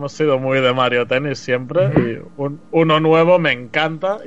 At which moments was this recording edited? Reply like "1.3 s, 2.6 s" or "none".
none